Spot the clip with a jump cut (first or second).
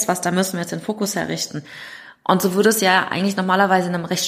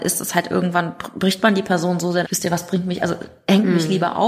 second